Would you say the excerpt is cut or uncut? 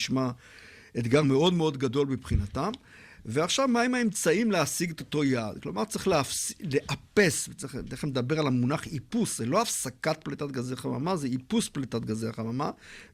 uncut